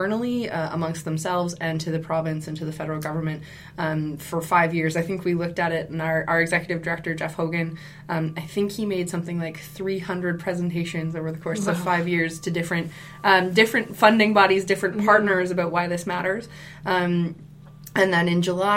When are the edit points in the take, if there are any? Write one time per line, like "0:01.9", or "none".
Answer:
none